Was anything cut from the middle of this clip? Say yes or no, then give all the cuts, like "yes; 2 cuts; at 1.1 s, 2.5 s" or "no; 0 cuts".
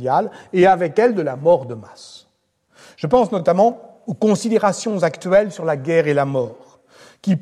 no; 0 cuts